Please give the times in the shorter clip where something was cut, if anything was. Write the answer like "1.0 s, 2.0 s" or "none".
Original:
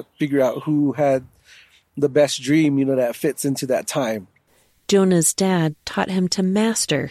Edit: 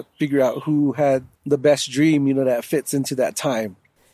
1.3 s